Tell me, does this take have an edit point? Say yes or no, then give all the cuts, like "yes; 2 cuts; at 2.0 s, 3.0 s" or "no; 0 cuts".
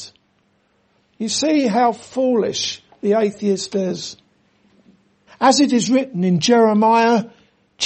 yes; 1 cut; at 5.3 s